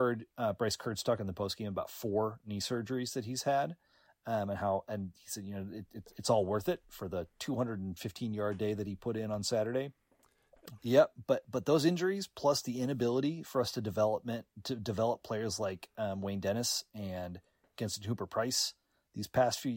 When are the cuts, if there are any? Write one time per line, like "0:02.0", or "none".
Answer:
0:05.1
0:10.8